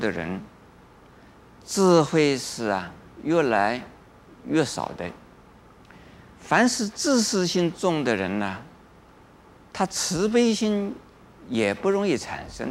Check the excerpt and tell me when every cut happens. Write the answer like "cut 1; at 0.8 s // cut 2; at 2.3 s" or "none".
none